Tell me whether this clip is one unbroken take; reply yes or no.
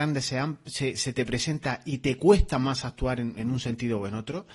yes